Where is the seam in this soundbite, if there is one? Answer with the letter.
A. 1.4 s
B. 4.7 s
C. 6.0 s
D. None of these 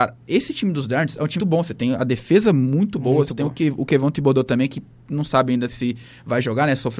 A